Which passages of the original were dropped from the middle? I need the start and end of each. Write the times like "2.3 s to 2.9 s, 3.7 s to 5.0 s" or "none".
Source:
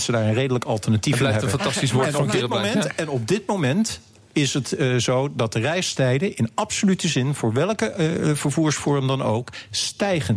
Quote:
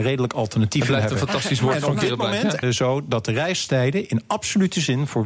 2.9 s to 4.9 s